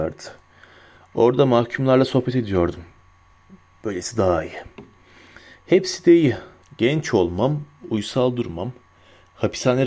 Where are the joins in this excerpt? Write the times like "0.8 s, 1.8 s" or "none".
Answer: 6.6 s